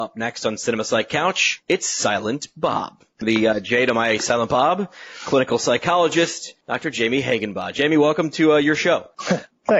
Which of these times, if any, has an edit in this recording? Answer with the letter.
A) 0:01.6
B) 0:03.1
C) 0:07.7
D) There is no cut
B